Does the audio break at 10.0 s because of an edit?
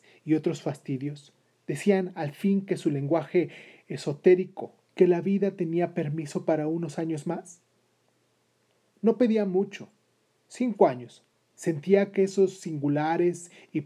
no; 2 cuts; at 4.9 s, 11.3 s

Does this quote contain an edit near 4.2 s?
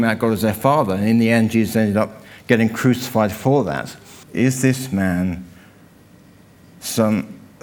yes; 1 cut; at 4.2 s

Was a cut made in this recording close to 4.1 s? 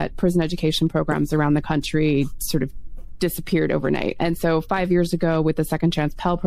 no; 0 cuts

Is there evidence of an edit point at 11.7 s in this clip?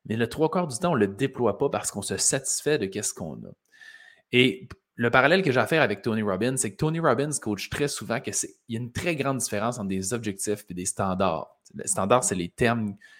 no; 0 cuts

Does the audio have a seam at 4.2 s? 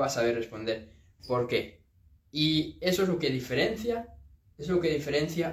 no; 0 cuts

